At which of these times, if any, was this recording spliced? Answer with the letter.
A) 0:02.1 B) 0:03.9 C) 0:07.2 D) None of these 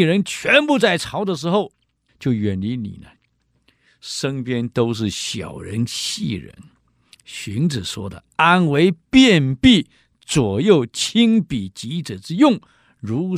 A